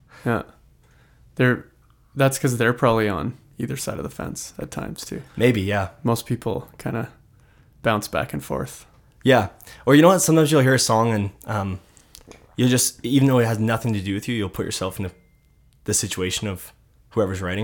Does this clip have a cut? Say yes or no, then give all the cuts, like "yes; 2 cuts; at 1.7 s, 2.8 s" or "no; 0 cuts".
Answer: no; 0 cuts